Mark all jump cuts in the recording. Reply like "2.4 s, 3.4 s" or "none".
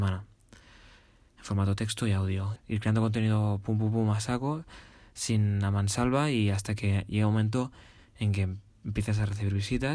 2.6 s